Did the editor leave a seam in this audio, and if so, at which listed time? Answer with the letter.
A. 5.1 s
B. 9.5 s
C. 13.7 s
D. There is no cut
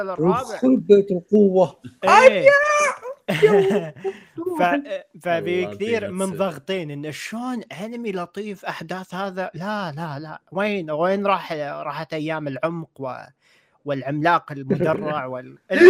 D